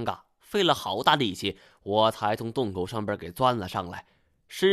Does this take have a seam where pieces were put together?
no; 0 cuts

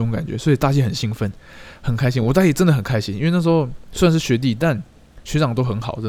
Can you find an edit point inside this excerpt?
no; 0 cuts

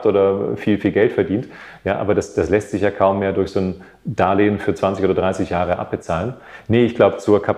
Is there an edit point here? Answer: no; 0 cuts

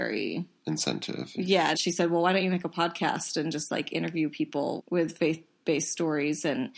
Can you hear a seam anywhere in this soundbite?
yes; 2 cuts; at 1.7 s, 4.8 s

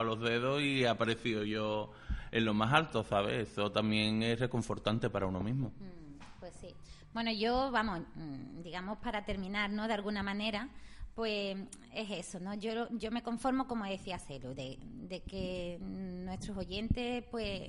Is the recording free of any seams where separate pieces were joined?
yes; 0 cuts

